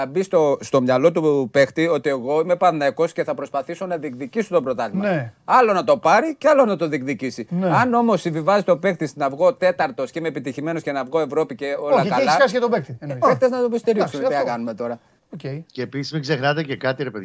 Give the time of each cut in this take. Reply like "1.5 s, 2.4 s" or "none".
13.2 s, 15.2 s